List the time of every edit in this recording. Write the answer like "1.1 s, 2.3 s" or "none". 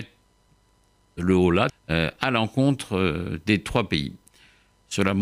1.7 s